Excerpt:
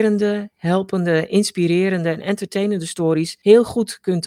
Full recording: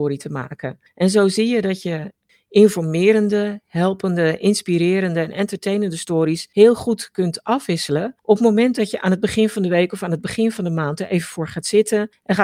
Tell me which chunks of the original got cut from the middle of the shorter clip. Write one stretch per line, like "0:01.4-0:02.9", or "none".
none